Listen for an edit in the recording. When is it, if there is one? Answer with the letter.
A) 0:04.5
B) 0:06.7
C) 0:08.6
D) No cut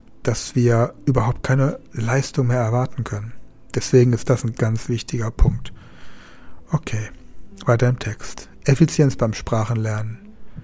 A